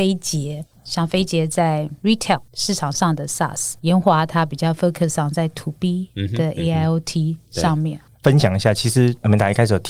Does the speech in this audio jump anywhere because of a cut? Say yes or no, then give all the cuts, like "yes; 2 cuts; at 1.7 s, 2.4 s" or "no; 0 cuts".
yes; 2 cuts; at 3.8 s, 8.1 s